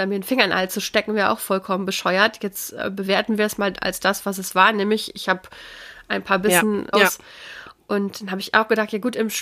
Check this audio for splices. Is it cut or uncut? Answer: cut